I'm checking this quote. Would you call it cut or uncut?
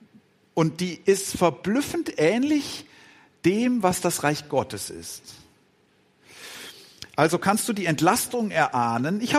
uncut